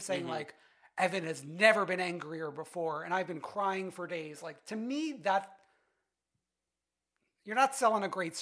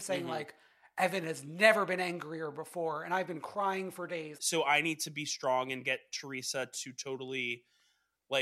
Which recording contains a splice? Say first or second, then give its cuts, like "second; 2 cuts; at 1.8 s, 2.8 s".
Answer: second; 1 cut; at 4.4 s